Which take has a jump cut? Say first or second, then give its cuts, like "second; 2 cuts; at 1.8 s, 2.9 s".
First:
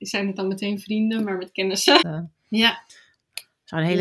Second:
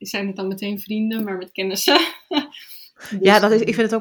first; 1 cut; at 2.0 s